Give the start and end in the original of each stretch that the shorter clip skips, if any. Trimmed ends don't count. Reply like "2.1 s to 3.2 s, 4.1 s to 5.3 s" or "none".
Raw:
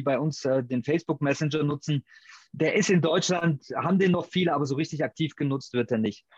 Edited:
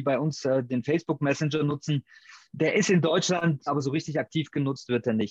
3.7 s to 4.5 s